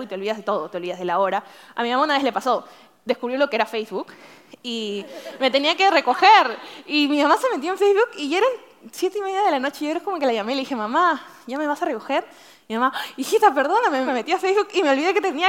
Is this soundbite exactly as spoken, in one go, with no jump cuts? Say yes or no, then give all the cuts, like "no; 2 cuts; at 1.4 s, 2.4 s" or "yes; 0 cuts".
no; 1 cut; at 14.1 s